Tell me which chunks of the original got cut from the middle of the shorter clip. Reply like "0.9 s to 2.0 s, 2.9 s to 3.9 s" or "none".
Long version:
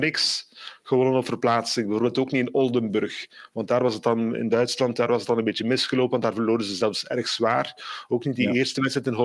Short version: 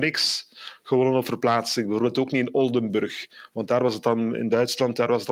none